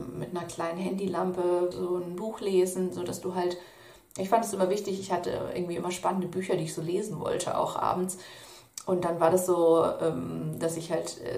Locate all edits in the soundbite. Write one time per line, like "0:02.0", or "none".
0:01.7